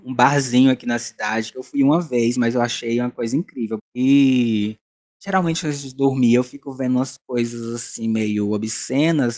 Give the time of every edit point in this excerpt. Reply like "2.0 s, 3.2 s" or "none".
3.8 s